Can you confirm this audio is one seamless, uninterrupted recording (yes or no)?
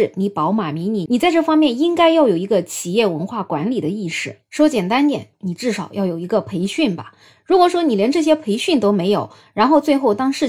no